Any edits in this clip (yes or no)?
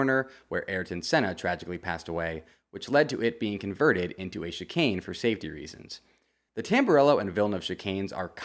yes